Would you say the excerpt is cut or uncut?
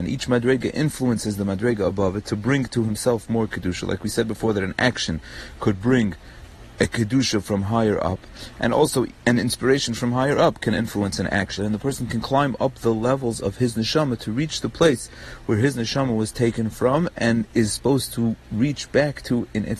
cut